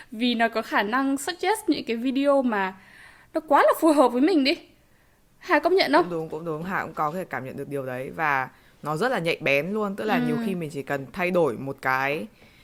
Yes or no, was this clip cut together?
no